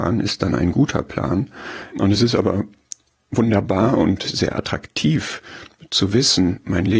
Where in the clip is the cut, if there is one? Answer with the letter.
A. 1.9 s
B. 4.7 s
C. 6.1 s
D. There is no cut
A